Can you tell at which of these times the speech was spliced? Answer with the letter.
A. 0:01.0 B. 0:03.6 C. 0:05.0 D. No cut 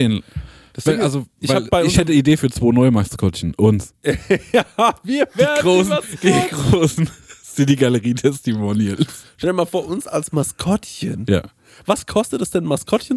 D